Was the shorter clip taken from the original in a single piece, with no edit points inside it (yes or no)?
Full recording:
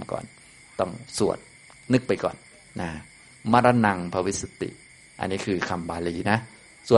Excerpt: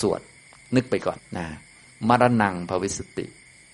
no